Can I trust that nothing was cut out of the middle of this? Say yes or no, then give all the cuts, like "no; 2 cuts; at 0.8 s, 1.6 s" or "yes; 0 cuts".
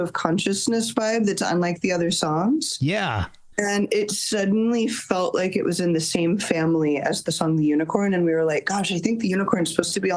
yes; 0 cuts